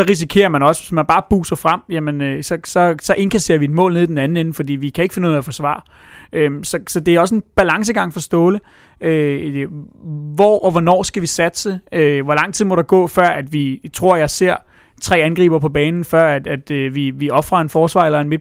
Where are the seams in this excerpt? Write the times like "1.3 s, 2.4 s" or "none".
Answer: none